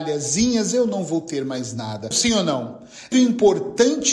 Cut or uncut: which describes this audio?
cut